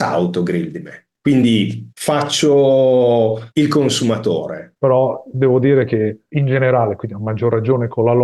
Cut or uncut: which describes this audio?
cut